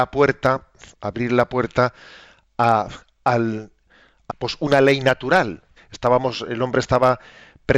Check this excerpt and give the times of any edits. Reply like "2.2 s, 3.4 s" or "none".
4.3 s, 5.8 s